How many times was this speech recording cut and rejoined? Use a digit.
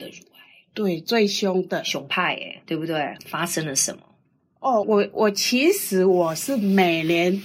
2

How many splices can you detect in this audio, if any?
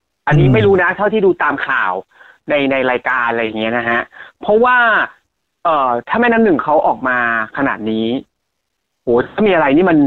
0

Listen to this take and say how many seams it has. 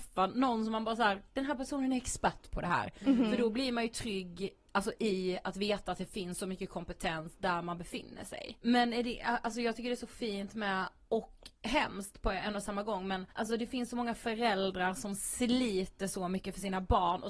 2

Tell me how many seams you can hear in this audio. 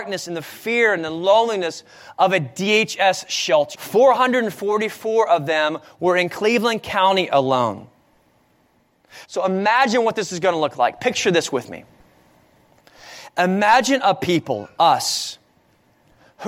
2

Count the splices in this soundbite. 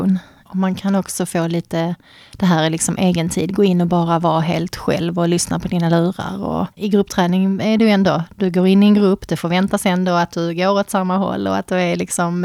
1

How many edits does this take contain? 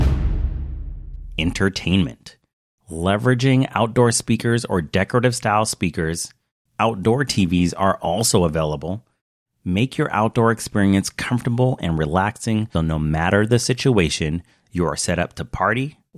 2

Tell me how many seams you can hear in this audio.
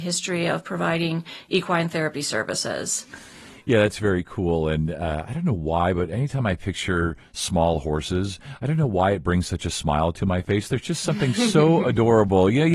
0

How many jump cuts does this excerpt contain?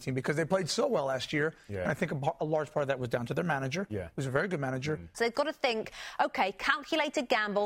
1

